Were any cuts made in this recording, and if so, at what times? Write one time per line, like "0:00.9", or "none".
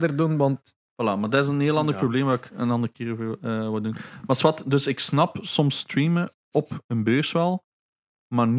none